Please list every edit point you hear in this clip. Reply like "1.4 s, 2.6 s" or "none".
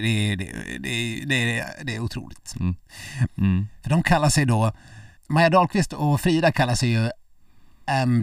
3.3 s, 5.2 s